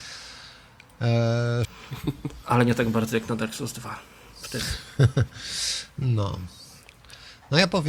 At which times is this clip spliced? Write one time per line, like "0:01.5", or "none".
0:01.6